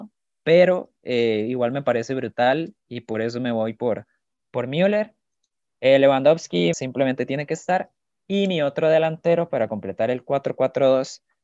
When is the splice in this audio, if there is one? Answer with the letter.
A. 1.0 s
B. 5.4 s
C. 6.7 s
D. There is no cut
C